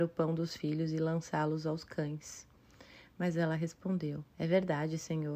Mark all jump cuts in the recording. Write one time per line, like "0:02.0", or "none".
0:04.3